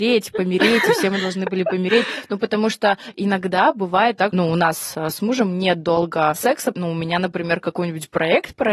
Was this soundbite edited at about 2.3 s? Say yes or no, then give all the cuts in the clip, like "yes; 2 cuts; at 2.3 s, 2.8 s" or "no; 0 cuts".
no; 2 cuts; at 4.3 s, 6.7 s